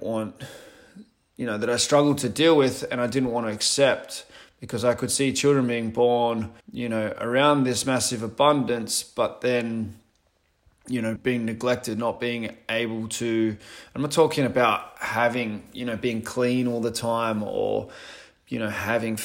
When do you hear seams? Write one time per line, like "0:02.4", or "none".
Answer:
0:06.6
0:11.2